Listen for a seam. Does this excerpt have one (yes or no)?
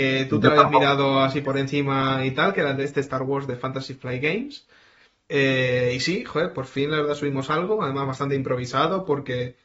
yes